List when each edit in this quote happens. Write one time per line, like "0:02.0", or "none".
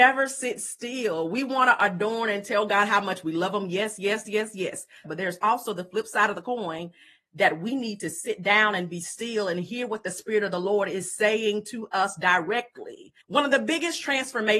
0:05.0
0:13.2